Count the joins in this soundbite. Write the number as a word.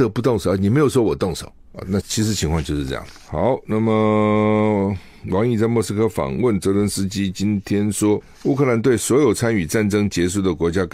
one